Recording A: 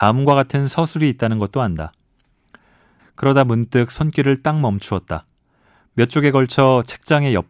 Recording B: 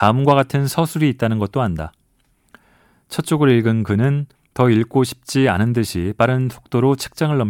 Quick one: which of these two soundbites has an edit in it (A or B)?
A